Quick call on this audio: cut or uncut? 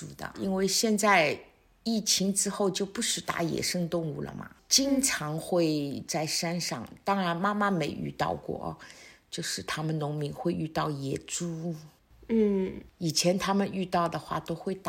uncut